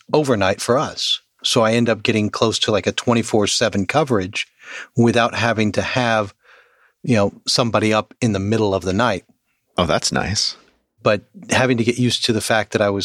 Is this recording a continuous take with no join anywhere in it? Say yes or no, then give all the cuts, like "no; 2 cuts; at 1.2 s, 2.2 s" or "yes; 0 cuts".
yes; 0 cuts